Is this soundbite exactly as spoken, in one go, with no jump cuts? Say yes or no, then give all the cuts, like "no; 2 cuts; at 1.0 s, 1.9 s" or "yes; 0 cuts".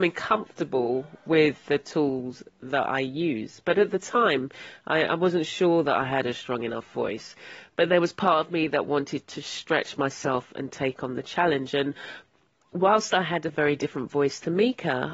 yes; 0 cuts